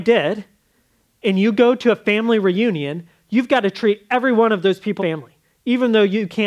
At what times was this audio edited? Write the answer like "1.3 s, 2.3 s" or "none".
5.0 s

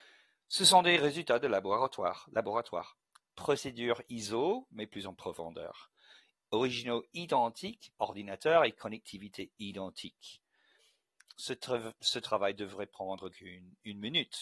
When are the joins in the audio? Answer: 7.9 s, 11.3 s, 13.3 s

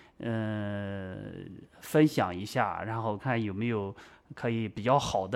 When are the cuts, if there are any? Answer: 3.2 s

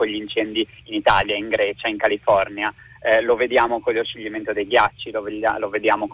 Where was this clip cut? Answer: none

